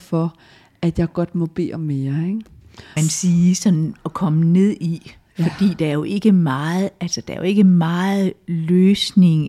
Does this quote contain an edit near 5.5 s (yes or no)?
no